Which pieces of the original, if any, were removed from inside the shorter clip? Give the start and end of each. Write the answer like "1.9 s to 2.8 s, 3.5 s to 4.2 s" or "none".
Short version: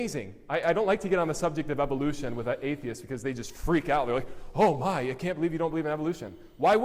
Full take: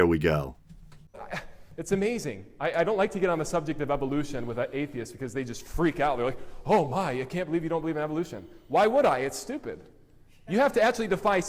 none